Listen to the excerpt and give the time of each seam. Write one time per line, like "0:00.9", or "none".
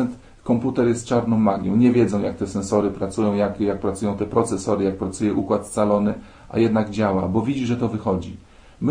none